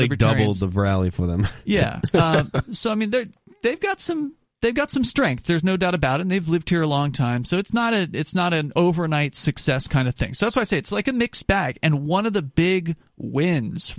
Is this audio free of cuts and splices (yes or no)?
yes